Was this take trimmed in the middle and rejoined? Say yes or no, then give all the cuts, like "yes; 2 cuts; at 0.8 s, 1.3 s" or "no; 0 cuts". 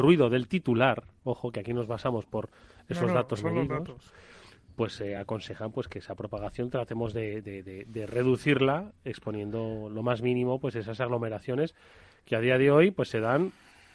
no; 0 cuts